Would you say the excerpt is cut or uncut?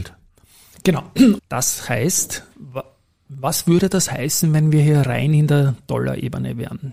cut